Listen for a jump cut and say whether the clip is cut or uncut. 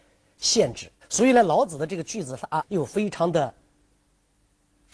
cut